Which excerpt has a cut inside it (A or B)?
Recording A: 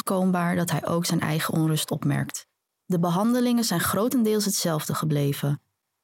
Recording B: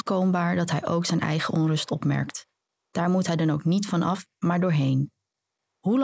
A